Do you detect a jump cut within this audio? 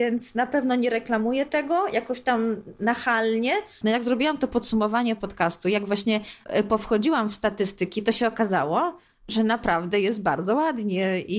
yes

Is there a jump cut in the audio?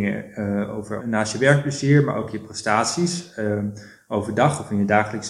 yes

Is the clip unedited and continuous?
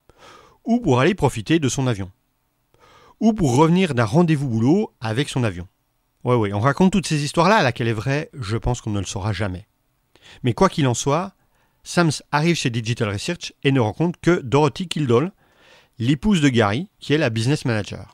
yes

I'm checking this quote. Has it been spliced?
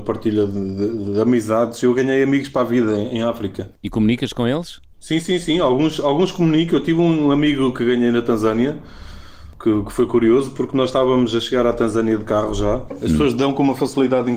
yes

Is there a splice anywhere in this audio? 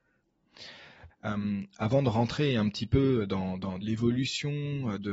yes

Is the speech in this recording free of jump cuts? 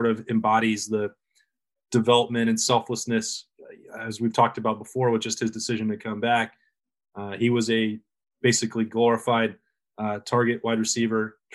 yes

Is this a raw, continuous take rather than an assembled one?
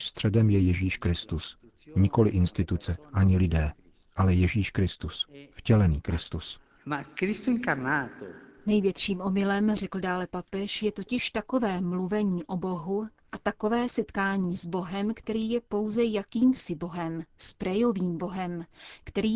yes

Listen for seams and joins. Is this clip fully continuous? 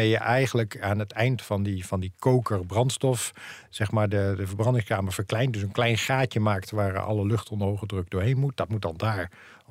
yes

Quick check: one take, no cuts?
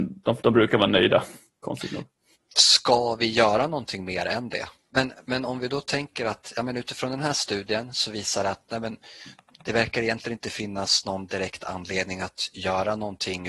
no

